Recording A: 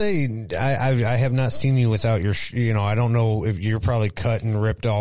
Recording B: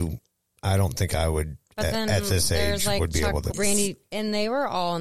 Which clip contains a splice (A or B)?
B